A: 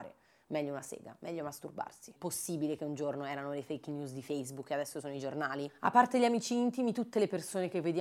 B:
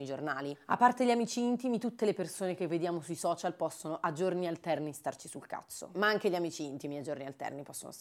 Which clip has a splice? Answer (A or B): A